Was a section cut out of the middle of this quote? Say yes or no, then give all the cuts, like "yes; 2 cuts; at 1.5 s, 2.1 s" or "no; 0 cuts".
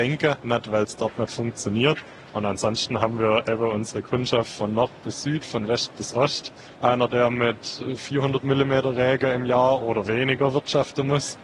yes; 1 cut; at 6.7 s